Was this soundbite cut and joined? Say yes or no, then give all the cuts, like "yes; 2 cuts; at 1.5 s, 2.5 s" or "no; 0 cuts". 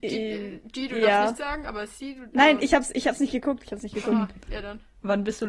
no; 0 cuts